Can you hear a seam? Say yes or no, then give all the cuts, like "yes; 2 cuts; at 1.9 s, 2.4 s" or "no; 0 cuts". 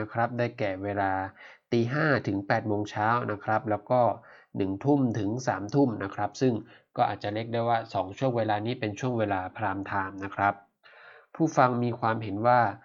no; 0 cuts